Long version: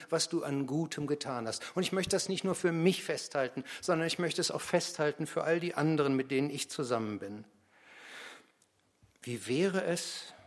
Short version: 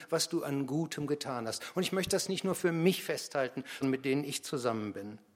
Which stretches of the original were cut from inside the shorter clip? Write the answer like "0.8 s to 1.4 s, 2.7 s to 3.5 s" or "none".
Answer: 3.8 s to 6.1 s